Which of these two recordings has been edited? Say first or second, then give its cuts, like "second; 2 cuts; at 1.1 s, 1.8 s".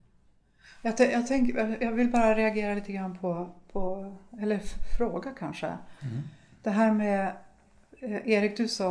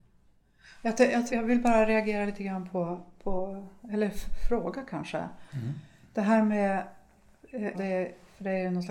second; 2 cuts; at 1.3 s, 7.7 s